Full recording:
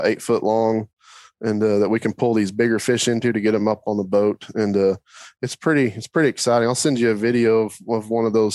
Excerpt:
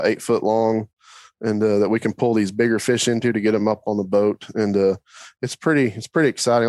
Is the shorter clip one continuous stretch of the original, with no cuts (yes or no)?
yes